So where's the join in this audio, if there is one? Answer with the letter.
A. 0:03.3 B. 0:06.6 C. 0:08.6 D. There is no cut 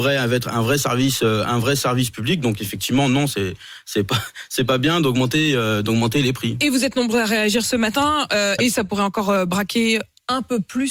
C